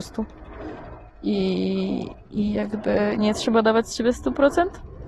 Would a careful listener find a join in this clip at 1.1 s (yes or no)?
no